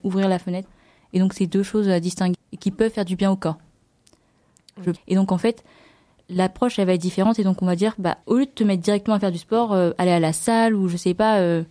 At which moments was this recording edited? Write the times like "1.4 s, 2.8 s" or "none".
2.3 s, 5.0 s, 8.2 s